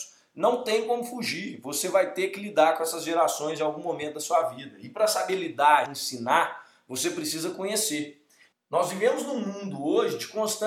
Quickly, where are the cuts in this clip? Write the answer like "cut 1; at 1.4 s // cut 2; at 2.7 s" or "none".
cut 1; at 5.9 s // cut 2; at 8.5 s